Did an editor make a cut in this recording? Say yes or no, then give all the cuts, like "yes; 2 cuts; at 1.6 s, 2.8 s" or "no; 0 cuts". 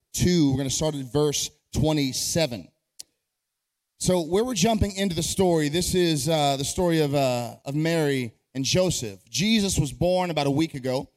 no; 0 cuts